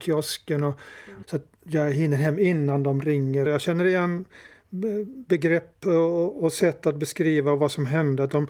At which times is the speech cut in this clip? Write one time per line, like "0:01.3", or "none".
0:01.2
0:03.5